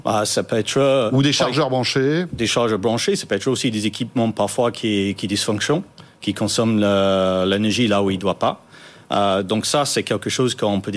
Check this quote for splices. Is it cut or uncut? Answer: uncut